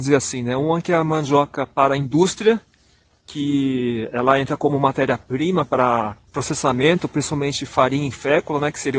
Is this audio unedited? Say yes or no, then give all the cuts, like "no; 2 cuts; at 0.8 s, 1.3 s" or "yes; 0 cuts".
no; 1 cut; at 6.3 s